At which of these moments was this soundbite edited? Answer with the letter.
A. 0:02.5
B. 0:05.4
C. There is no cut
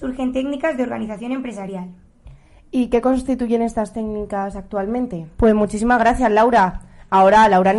B